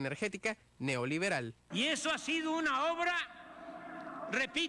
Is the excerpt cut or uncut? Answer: cut